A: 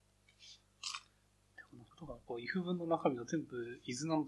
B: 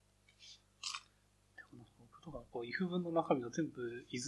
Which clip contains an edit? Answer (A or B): A